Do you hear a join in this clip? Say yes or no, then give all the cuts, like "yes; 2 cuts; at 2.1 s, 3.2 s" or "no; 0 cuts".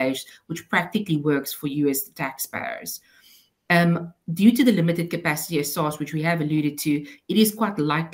no; 0 cuts